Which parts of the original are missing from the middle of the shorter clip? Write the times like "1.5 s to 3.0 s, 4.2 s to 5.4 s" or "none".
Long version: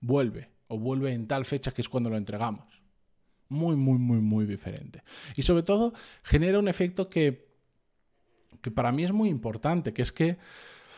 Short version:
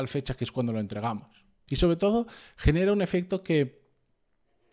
3.0 s to 5.3 s